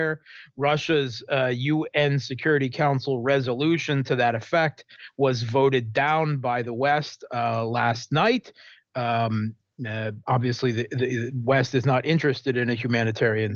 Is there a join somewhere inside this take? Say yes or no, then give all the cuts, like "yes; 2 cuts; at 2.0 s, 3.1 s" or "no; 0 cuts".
no; 0 cuts